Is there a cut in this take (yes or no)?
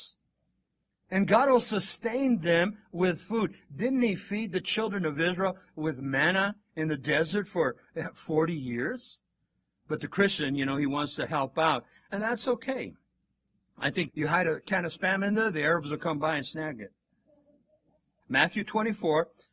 yes